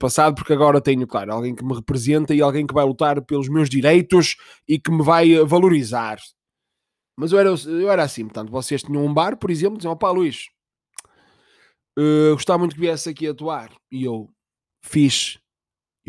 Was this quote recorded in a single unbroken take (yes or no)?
no